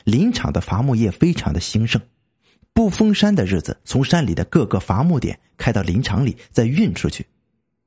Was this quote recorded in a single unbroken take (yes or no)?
no